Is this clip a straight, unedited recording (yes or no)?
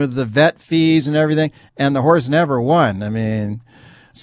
yes